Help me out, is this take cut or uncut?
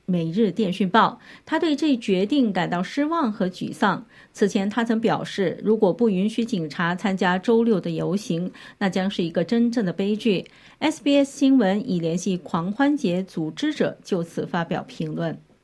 uncut